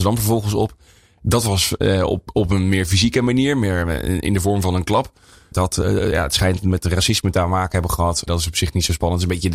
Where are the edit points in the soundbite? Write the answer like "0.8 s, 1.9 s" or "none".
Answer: 5.5 s, 8.3 s